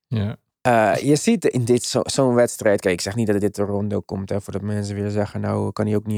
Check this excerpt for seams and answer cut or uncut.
uncut